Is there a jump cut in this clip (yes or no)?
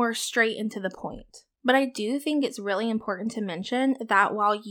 yes